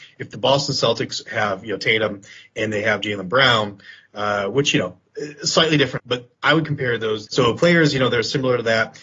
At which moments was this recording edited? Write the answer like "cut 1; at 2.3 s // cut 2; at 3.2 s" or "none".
cut 1; at 6.0 s // cut 2; at 7.3 s